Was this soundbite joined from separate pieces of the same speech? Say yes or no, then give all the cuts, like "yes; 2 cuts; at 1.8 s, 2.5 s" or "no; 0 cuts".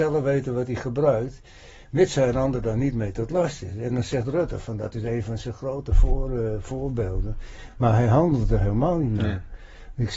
no; 0 cuts